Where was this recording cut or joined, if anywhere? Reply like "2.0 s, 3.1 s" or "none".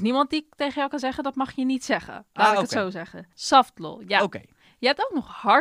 3.3 s